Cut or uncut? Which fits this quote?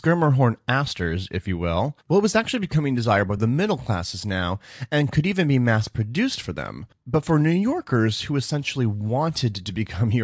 uncut